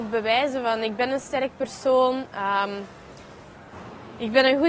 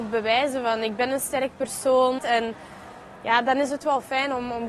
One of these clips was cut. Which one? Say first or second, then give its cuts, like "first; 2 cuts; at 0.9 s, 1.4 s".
second; 1 cut; at 2.2 s